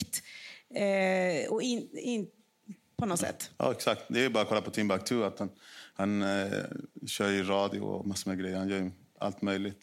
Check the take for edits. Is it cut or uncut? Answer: uncut